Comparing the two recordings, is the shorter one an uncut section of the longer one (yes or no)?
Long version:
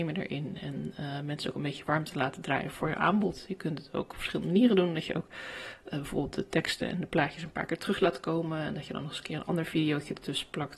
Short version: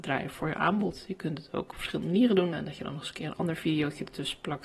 no